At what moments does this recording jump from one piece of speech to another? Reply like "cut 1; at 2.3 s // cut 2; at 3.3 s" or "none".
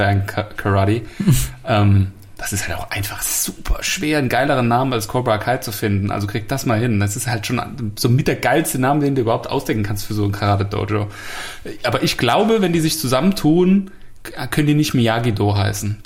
none